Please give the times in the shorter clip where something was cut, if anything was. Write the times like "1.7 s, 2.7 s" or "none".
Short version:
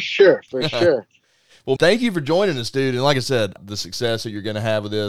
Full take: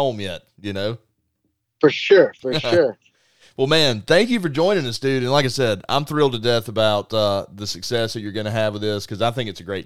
1.8 s, 3.6 s